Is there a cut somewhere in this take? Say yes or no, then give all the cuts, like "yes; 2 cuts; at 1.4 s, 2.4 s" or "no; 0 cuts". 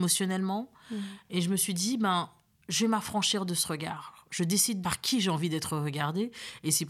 no; 0 cuts